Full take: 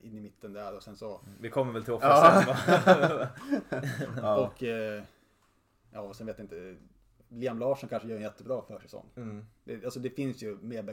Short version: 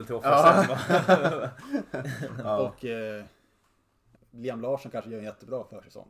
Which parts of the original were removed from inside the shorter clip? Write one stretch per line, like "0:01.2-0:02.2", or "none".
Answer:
0:05.9-0:07.1